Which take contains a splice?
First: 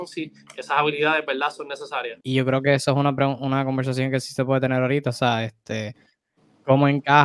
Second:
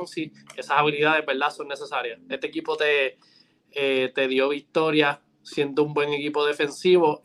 first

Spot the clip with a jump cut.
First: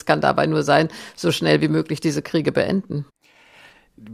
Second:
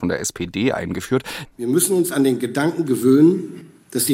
second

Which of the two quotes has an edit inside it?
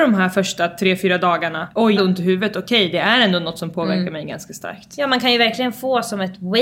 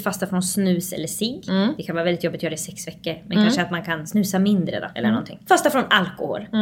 first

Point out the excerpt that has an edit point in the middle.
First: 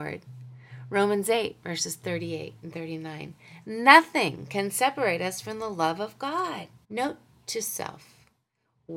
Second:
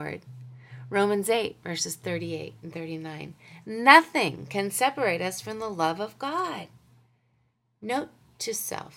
first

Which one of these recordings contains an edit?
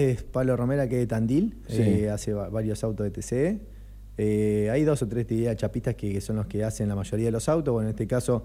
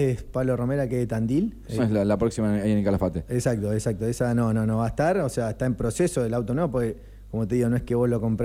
second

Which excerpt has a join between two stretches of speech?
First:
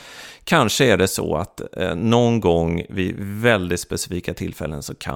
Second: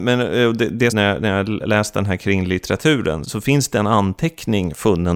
second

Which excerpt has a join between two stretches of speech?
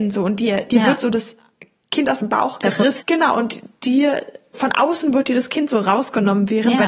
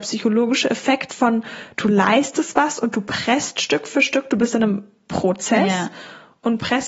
first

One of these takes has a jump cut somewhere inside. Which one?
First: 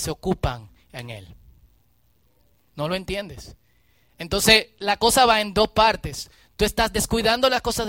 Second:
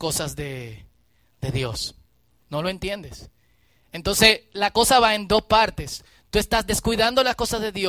second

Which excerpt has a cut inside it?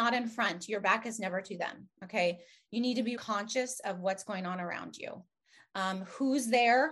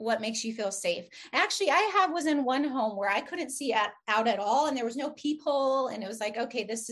first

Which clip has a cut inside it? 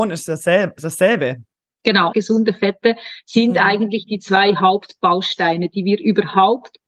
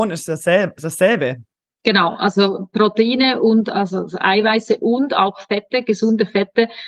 first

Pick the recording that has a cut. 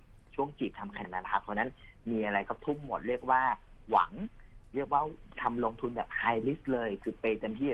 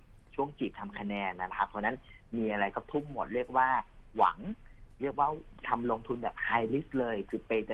first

